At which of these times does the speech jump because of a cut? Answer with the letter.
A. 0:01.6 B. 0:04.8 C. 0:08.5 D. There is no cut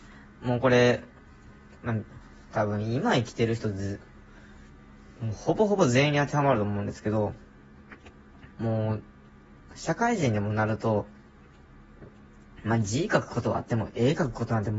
C